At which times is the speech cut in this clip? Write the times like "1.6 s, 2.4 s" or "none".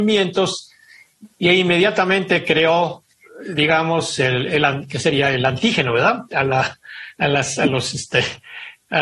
none